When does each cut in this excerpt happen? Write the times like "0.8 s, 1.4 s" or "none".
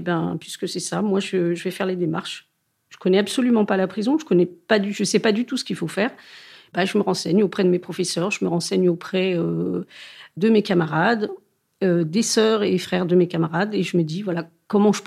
none